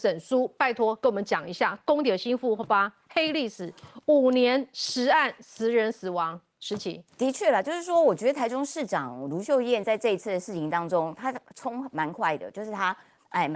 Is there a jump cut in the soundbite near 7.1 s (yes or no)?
yes